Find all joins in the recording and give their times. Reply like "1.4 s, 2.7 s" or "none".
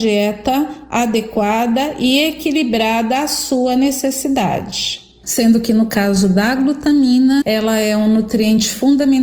5.2 s, 7.4 s